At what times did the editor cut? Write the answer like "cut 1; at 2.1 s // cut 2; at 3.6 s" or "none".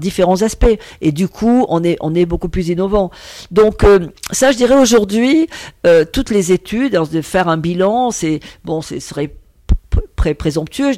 none